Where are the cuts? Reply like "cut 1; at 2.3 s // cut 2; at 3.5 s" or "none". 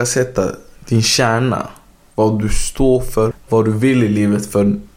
cut 1; at 3.3 s